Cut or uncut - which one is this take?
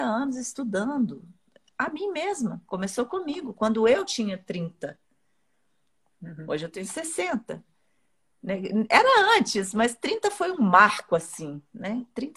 uncut